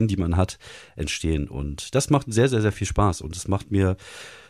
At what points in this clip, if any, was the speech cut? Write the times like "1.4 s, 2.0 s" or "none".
none